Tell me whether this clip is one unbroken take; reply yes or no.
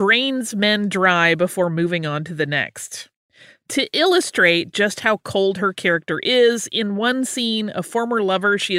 yes